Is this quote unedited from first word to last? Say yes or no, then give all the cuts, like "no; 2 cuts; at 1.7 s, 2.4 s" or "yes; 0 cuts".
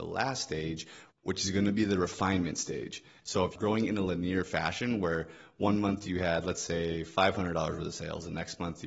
no; 1 cut; at 3.2 s